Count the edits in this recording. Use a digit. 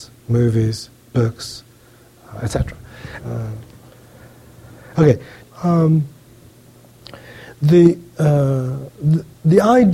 2